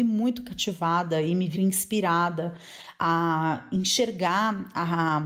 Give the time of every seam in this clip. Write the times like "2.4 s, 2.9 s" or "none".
1.5 s